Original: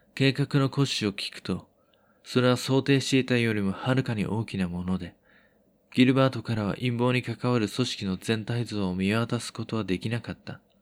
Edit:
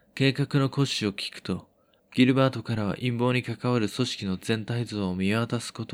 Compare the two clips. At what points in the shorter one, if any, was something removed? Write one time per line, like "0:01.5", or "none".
0:02.0